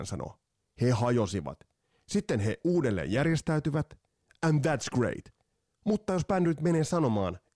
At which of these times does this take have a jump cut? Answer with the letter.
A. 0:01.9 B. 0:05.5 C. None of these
C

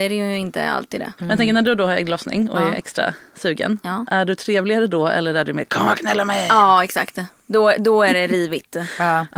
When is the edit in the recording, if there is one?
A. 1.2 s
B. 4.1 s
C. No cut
A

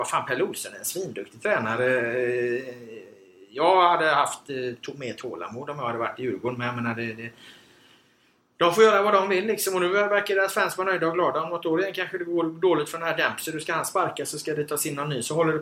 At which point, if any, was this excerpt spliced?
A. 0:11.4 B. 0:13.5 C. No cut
C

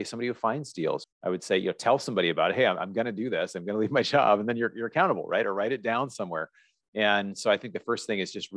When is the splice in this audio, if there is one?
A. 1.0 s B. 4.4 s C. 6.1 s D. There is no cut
A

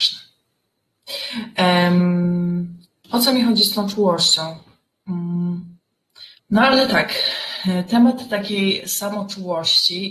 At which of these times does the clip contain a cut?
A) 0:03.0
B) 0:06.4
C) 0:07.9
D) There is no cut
B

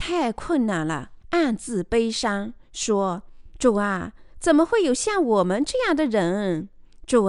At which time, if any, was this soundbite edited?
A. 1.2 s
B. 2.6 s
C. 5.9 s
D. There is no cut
A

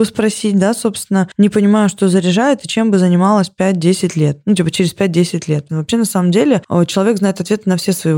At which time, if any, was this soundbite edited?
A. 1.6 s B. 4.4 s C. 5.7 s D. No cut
C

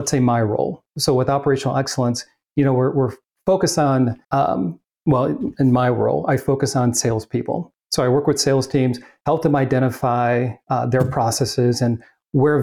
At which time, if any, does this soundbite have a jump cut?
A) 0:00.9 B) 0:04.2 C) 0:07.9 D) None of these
B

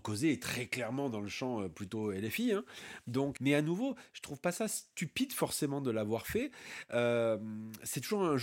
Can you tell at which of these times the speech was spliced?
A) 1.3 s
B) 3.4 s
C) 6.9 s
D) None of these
B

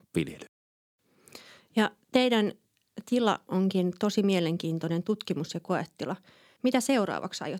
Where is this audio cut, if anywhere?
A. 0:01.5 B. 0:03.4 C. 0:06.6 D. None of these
C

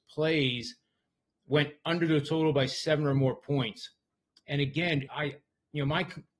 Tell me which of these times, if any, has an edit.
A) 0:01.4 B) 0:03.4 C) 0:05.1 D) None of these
C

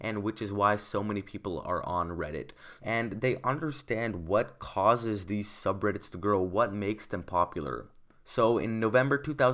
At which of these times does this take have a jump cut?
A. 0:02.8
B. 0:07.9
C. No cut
A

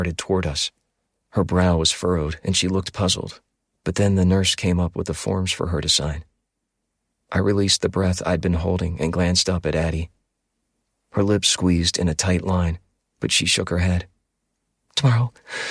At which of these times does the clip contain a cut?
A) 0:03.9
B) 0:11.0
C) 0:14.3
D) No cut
D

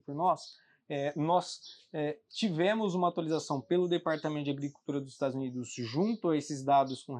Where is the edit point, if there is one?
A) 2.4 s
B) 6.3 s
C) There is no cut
C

